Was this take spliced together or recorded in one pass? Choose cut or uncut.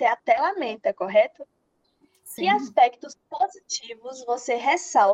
uncut